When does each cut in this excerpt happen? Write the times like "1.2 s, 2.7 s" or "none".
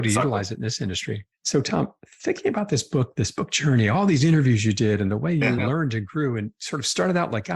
1.3 s